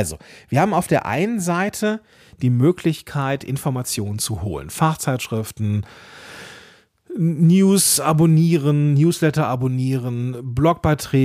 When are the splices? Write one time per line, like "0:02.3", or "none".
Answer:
none

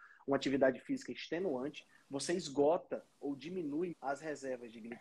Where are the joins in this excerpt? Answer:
0:03.9

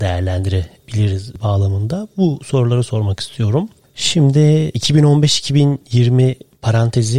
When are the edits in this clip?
none

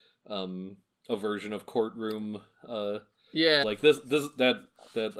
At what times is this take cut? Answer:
0:03.6

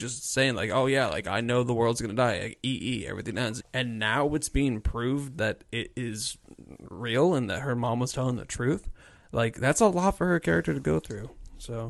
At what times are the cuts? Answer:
0:03.6

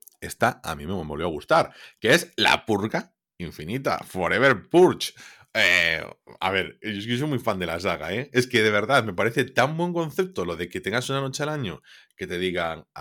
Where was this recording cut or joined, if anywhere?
none

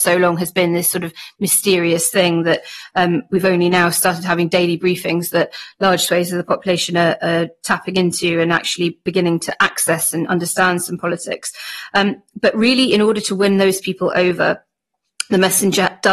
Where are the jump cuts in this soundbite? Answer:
none

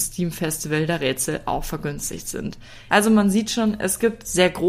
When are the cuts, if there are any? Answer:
0:02.9

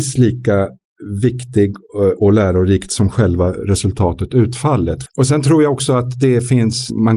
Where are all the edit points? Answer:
0:02.2
0:05.1

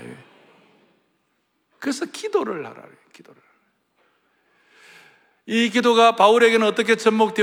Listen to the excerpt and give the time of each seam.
none

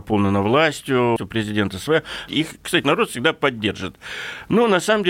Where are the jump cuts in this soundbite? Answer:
0:01.2
0:02.3

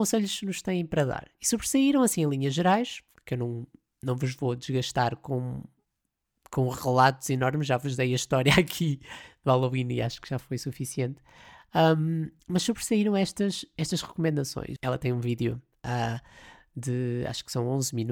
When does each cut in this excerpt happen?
0:12.4
0:14.8

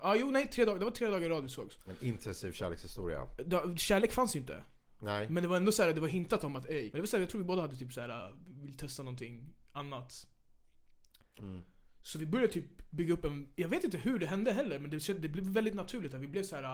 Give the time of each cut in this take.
0:11.4

